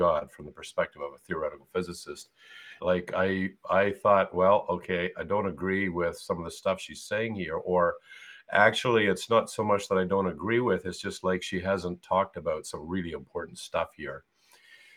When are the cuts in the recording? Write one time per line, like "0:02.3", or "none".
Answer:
0:02.8